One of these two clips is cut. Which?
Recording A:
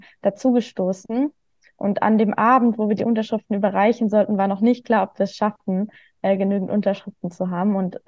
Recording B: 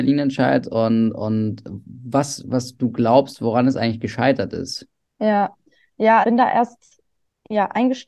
B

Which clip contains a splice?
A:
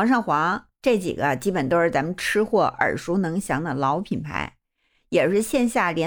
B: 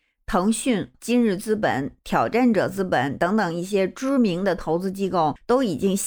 B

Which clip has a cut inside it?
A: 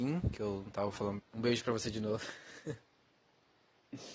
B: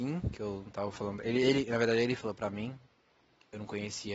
A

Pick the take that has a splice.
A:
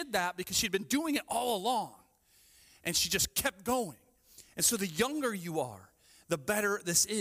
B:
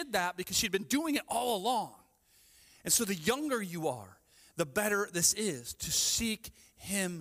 B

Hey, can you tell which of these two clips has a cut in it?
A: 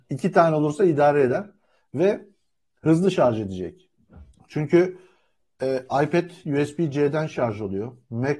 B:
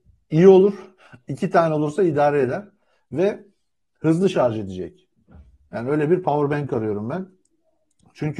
A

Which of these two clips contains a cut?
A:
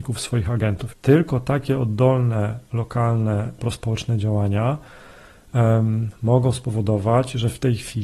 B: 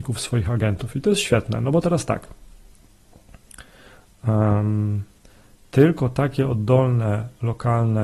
A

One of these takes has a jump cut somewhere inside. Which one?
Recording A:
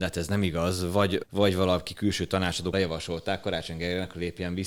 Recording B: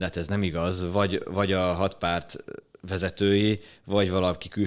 A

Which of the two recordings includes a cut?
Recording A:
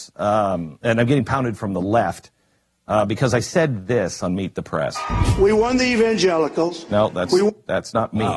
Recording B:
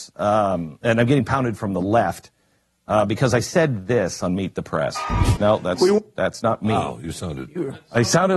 B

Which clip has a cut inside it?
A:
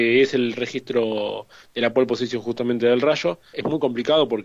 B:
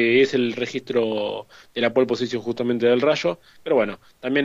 A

